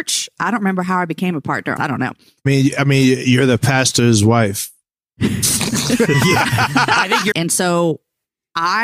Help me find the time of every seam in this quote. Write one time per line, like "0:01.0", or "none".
0:01.8
0:07.3